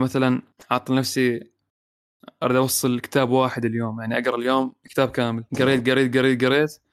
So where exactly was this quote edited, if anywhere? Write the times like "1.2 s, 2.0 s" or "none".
5.5 s